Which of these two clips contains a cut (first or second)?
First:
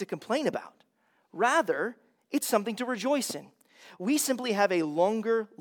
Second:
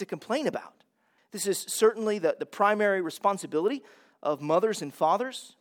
second